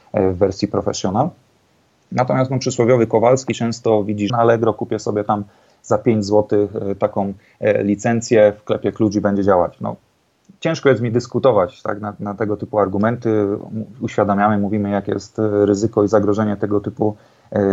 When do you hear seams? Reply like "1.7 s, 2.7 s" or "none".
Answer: 4.3 s